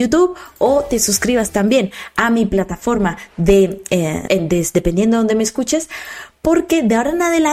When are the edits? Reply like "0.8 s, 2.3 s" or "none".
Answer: 4.3 s